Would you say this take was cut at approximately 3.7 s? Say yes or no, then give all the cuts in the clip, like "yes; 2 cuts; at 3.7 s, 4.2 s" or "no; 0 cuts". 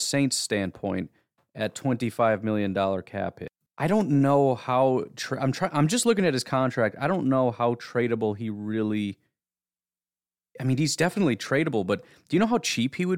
yes; 1 cut; at 3.7 s